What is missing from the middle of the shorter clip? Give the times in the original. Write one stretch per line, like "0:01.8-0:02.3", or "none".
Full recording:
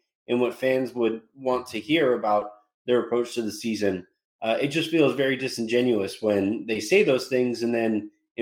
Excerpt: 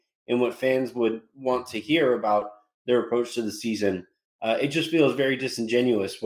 none